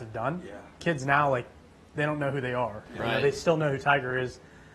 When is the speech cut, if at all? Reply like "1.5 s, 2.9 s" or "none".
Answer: none